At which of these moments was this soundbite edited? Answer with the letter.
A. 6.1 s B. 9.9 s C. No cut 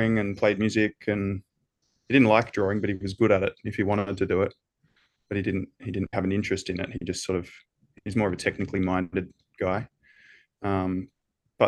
A